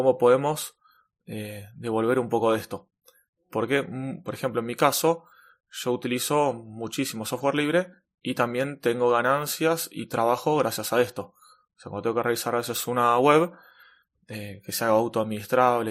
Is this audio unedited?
yes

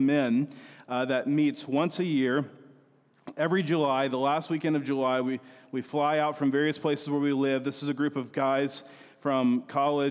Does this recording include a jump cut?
no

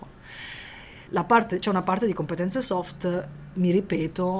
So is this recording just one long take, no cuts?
no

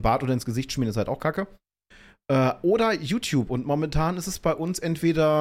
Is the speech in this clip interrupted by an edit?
no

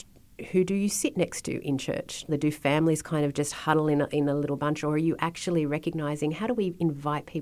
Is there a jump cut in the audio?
yes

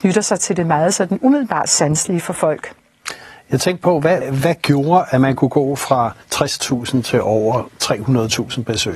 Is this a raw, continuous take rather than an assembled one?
no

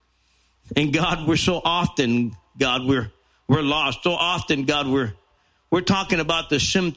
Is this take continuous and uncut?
yes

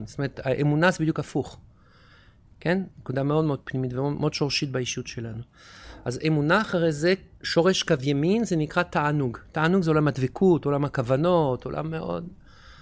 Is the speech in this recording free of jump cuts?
no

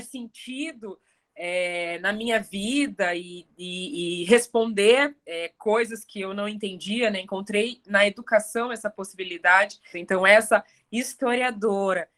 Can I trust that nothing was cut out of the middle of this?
no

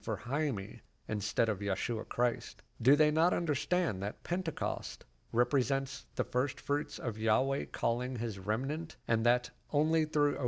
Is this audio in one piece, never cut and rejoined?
no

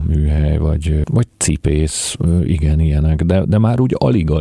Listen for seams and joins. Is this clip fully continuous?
no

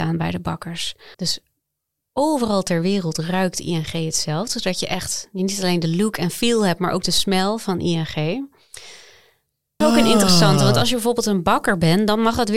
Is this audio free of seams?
no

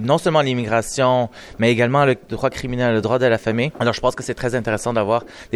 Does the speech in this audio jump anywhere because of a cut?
no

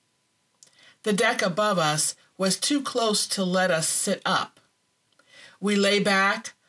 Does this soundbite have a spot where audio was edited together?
no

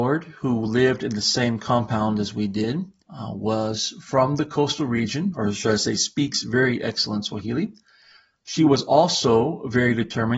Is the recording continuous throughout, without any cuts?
no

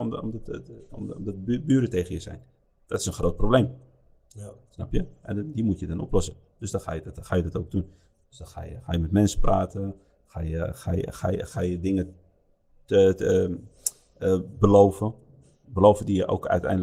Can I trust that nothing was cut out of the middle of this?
yes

